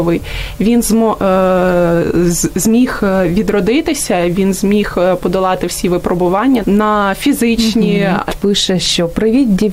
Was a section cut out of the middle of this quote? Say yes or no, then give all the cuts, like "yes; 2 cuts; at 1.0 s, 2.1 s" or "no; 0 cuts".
yes; 2 cuts; at 6.6 s, 8.3 s